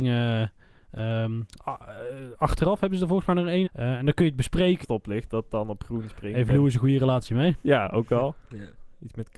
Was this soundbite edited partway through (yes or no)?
yes